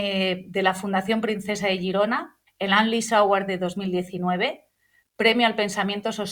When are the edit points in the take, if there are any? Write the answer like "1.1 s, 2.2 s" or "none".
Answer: 2.5 s